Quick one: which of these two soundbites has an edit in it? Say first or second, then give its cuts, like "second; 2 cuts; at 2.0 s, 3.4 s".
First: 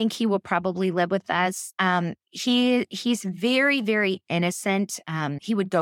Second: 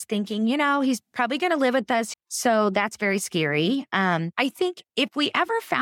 second; 1 cut; at 2.1 s